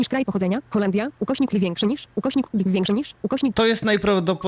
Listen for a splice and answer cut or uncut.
cut